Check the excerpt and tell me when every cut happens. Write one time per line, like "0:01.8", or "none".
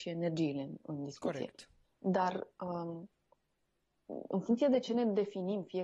none